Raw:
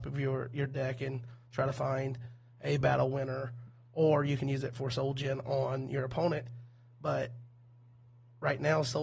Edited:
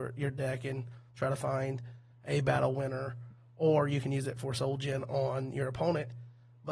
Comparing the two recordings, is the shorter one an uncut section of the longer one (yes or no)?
yes